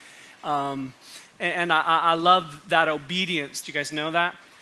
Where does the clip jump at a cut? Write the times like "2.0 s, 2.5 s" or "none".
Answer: 3.6 s